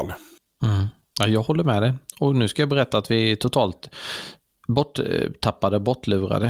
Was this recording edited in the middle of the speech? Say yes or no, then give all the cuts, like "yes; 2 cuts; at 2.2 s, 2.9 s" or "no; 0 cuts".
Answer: no; 0 cuts